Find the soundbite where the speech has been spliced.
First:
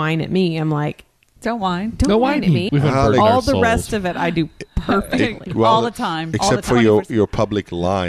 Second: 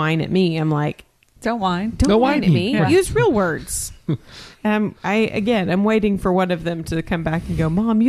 first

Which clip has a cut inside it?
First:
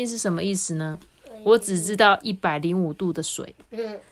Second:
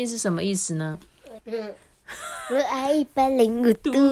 second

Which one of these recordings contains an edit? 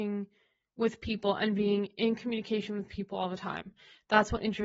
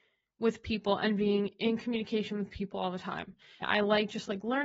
second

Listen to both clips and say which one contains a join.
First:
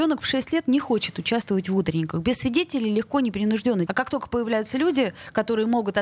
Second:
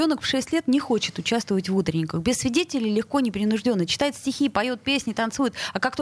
first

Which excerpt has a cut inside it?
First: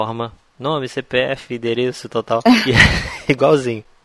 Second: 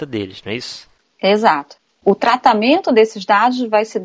first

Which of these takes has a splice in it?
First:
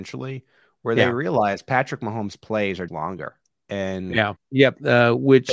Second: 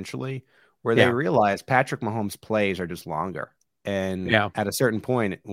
first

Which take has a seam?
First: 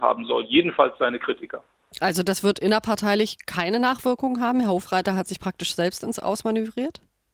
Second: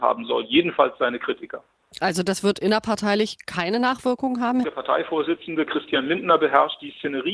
second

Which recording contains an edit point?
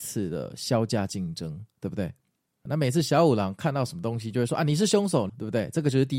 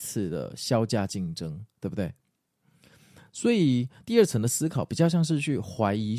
first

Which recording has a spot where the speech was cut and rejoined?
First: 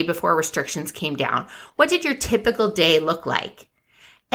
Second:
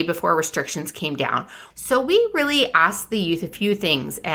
second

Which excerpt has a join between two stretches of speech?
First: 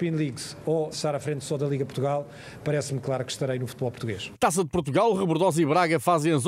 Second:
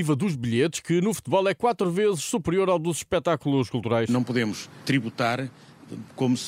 first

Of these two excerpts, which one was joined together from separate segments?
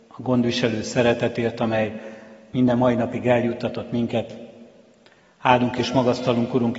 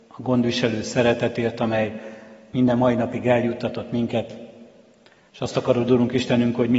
second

